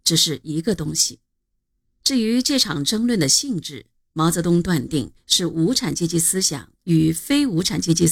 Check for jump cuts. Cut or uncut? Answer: cut